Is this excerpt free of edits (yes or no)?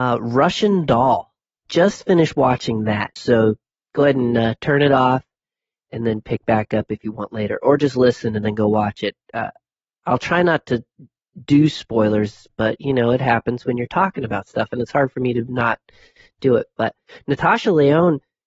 no